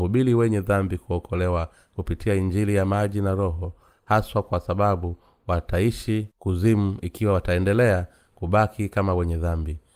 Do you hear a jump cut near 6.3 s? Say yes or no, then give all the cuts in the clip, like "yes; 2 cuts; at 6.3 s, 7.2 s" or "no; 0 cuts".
yes; 1 cut; at 6.3 s